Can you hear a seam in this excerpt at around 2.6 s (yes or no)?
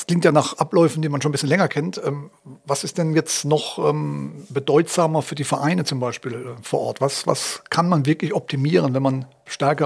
no